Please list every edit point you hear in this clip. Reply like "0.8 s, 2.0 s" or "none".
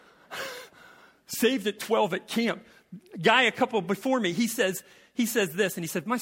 none